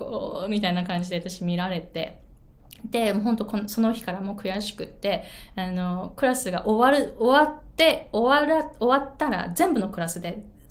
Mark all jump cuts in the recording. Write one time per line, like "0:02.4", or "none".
none